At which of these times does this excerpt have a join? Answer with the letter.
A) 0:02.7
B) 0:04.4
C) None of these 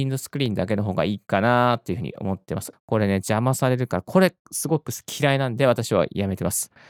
A